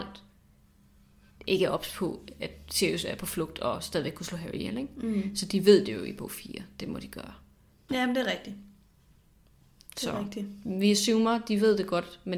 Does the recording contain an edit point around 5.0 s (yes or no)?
no